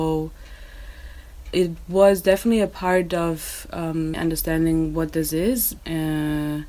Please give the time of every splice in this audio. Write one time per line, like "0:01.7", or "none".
0:04.1
0:05.8